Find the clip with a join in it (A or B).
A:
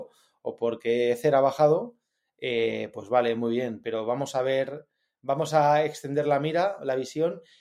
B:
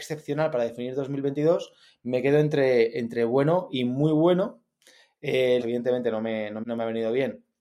B